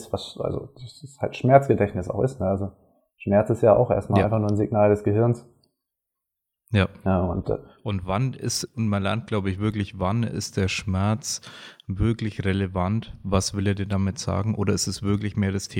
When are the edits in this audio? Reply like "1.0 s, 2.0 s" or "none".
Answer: none